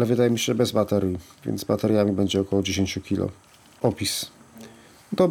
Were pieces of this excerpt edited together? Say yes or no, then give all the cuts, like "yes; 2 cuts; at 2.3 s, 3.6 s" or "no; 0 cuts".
no; 0 cuts